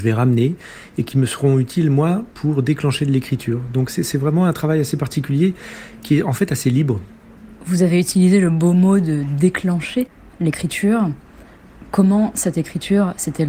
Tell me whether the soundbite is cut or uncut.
uncut